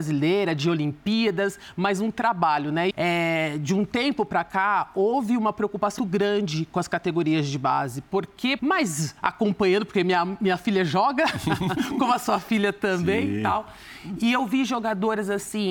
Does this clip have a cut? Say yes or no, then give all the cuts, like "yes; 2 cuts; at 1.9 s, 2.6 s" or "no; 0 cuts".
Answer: yes; 3 cuts; at 2.9 s, 6.0 s, 8.6 s